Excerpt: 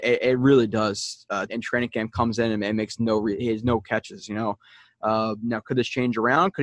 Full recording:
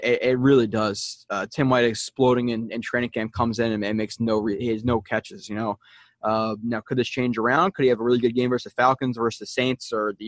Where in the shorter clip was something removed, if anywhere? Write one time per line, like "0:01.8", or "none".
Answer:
0:01.5

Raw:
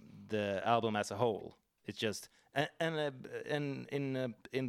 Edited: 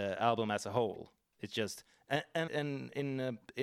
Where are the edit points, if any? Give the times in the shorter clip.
0:02.5

